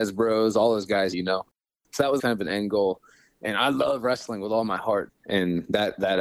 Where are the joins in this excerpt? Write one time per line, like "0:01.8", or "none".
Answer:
0:01.1
0:02.2
0:05.1